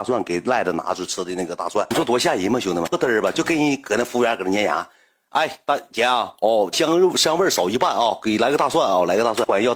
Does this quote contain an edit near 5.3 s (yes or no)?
no